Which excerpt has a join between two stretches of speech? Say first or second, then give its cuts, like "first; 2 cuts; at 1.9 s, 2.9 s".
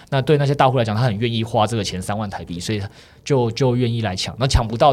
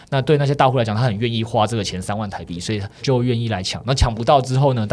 second; 1 cut; at 3.0 s